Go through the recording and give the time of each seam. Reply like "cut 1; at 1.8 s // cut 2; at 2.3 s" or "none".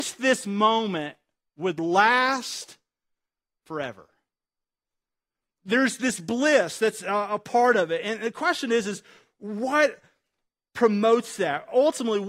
none